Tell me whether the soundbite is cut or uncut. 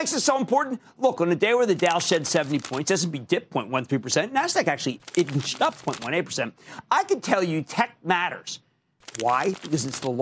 uncut